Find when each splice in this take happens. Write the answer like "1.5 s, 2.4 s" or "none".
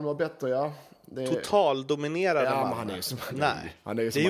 none

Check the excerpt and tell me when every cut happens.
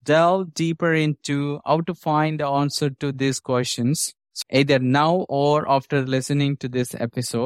4.4 s

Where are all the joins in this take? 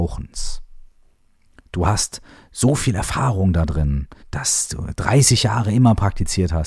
4.2 s

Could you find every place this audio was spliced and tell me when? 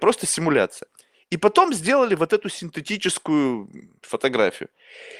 none

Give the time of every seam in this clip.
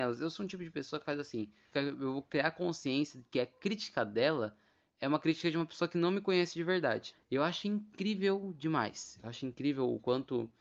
1.7 s, 7.1 s

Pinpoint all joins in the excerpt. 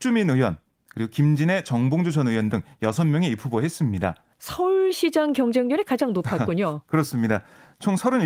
4.3 s

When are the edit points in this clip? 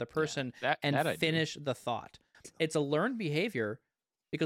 2.4 s

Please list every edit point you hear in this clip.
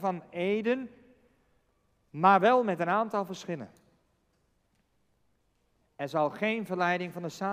none

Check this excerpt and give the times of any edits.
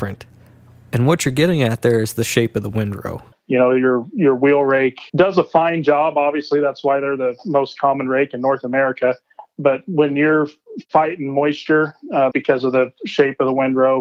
3.3 s, 5.1 s, 12.3 s

